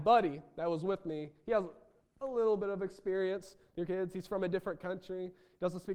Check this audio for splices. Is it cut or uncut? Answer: uncut